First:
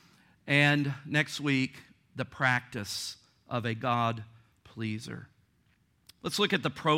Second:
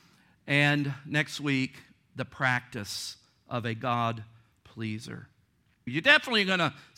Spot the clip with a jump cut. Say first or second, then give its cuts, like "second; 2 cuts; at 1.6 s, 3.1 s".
second; 1 cut; at 5.9 s